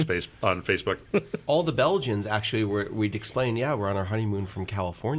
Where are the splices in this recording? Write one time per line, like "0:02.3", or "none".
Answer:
none